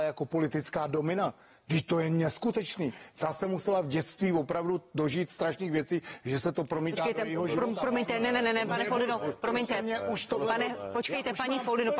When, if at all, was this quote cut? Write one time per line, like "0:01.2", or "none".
none